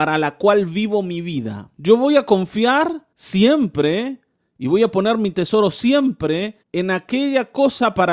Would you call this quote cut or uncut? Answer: cut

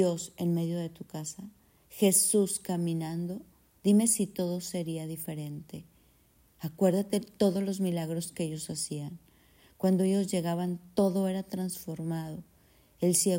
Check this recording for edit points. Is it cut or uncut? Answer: uncut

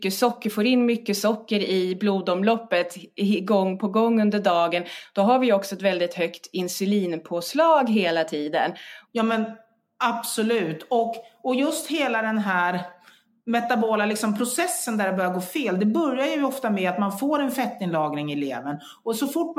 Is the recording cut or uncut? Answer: cut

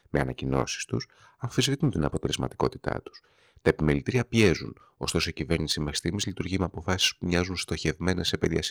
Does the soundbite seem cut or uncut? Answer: uncut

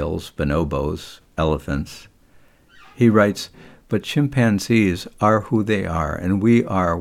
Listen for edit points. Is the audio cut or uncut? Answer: uncut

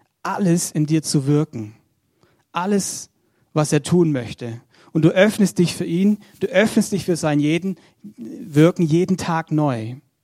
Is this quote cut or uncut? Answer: uncut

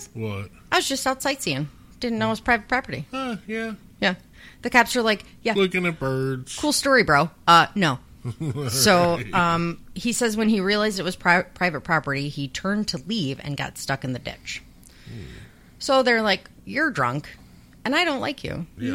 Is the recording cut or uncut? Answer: cut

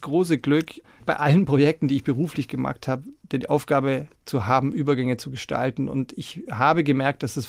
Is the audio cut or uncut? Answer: uncut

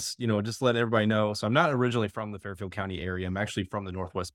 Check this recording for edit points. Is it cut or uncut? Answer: uncut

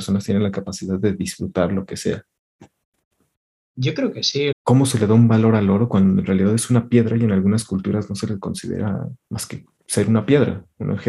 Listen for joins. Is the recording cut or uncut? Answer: cut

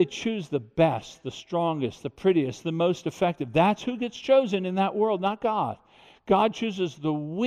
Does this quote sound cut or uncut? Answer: uncut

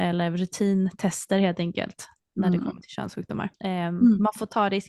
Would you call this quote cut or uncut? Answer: cut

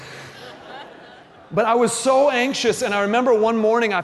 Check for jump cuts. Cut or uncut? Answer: uncut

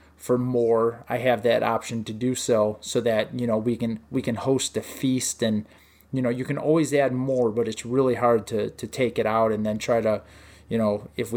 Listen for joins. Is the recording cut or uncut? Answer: uncut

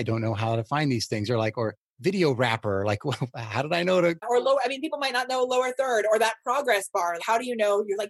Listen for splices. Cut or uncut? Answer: cut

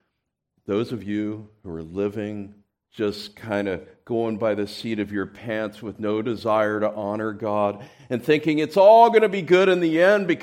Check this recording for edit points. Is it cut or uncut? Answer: uncut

